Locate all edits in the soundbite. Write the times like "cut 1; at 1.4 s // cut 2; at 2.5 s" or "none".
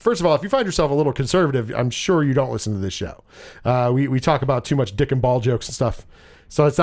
none